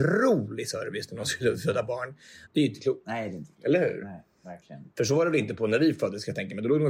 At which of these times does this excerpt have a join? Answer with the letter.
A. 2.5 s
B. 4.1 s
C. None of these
A